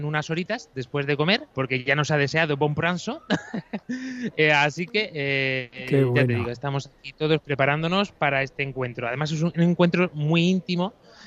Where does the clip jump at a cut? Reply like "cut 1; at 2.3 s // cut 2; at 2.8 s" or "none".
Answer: cut 1; at 1.5 s

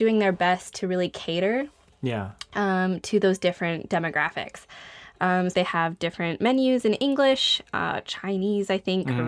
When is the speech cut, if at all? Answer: cut 1; at 5.5 s

